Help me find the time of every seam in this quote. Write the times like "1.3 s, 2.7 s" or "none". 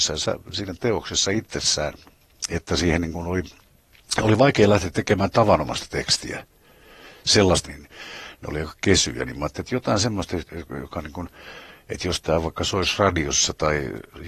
7.6 s